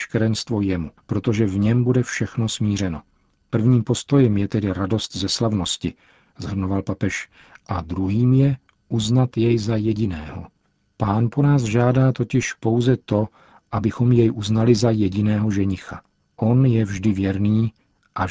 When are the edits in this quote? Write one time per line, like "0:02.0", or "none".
none

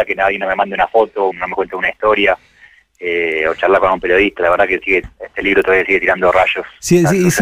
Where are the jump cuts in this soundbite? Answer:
0:01.3

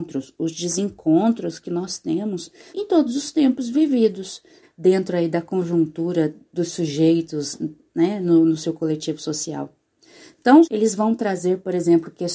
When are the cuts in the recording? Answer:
0:02.7
0:04.6
0:10.6

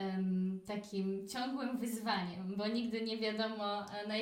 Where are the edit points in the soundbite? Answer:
none

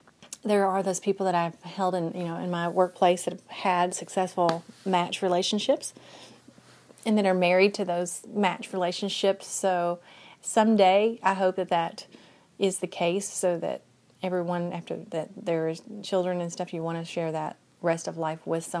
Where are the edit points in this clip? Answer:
none

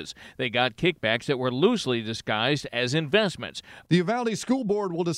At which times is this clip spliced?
0:03.8

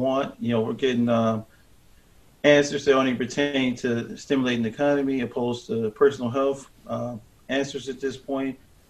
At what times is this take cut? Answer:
none

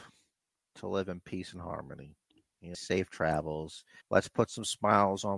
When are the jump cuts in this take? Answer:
0:02.7
0:04.0

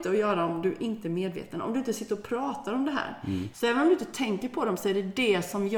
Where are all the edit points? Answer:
0:03.5

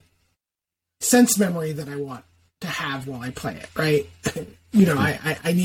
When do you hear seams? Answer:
none

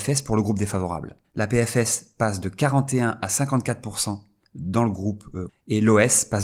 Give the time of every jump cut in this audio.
0:01.2
0:05.5

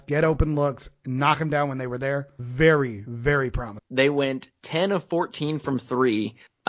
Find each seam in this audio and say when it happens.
0:03.8

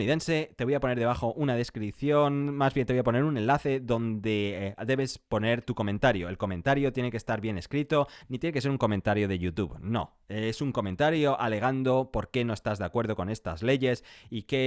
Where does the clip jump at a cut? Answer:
0:08.2

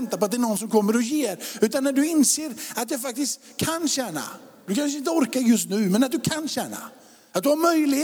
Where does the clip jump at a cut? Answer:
none

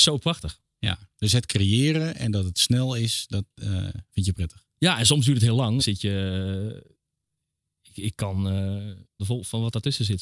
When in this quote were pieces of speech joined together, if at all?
0:05.8
0:09.2

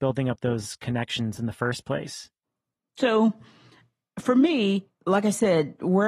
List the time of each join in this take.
none

